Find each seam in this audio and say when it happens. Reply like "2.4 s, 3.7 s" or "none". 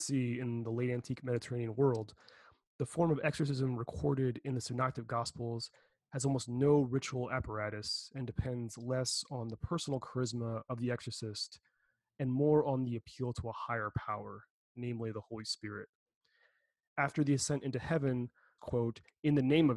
18.6 s